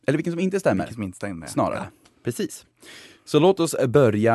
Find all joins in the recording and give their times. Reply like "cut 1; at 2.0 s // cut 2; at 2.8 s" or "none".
none